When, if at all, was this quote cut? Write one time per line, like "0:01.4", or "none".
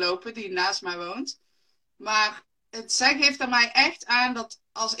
none

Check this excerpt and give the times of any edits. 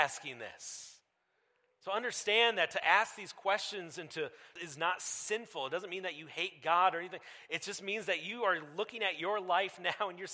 0:04.6

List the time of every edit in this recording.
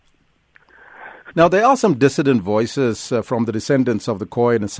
0:01.3

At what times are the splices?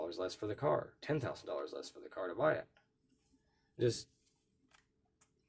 none

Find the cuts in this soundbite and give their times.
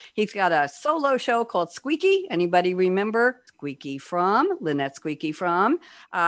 0:03.5

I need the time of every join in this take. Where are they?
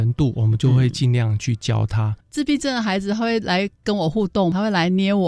0:02.2

